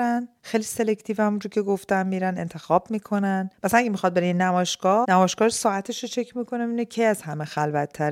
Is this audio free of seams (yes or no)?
no